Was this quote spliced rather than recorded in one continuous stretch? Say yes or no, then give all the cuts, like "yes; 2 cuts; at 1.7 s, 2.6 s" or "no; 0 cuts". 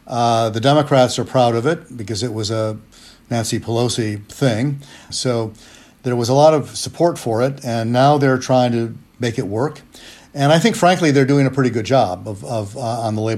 yes; 1 cut; at 5.1 s